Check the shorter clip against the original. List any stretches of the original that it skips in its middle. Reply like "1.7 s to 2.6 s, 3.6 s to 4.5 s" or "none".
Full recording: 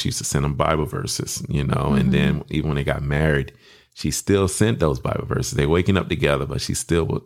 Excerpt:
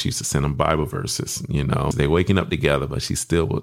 1.9 s to 5.5 s